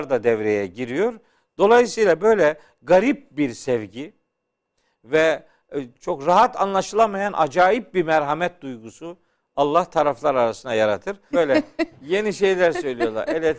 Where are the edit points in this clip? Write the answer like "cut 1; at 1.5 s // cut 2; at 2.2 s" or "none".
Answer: cut 1; at 5.9 s // cut 2; at 11.3 s